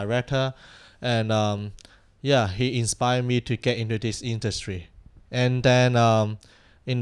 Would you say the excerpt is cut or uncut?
uncut